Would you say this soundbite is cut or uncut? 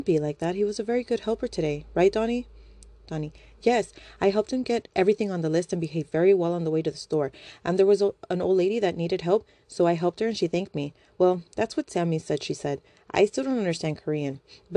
uncut